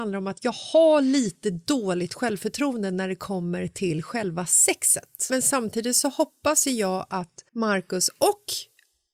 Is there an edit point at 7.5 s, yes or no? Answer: yes